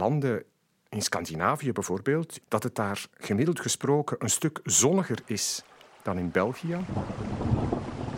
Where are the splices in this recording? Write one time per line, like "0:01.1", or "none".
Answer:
0:02.4